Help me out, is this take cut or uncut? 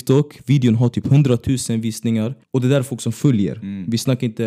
cut